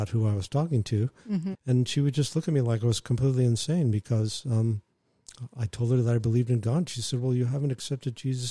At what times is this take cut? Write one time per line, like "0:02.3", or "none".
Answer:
0:01.5